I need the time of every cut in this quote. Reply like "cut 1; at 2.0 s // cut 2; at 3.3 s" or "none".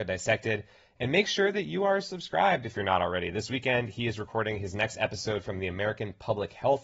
none